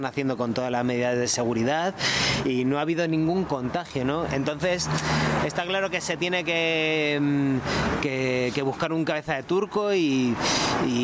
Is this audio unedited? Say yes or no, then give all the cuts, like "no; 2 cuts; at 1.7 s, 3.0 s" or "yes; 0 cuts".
yes; 0 cuts